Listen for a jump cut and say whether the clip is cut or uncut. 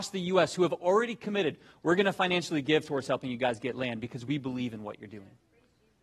uncut